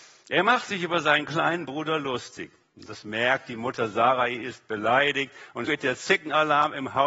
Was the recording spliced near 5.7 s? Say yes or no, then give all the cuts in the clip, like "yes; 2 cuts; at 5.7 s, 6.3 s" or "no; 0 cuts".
yes; 1 cut; at 5.7 s